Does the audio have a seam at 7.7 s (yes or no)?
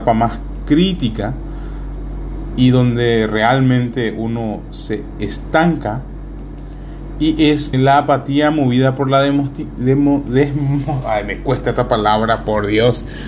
yes